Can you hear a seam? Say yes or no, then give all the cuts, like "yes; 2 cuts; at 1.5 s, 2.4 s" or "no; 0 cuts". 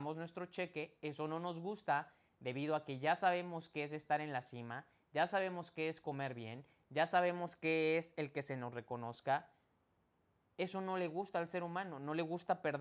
no; 0 cuts